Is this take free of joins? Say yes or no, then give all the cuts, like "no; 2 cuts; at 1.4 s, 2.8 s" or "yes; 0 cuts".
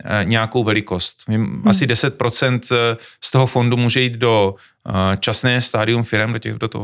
yes; 0 cuts